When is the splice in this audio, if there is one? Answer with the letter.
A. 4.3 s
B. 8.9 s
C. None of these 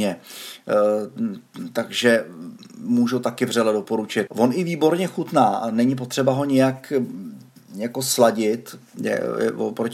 A